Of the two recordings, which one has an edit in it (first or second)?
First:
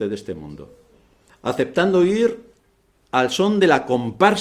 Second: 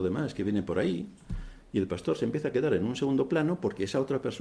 first